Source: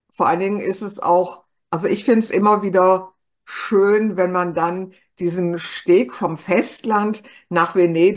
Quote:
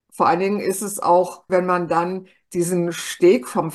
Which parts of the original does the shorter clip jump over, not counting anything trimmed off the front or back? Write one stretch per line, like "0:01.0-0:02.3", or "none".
0:01.5-0:04.2

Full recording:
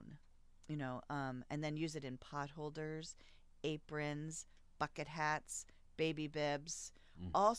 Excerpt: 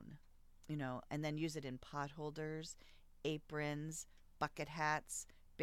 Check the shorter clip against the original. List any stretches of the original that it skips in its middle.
0:01.1-0:01.5

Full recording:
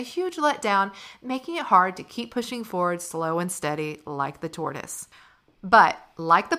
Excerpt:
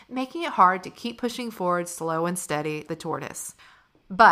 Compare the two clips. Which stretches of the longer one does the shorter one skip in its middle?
0:04.0-0:04.4

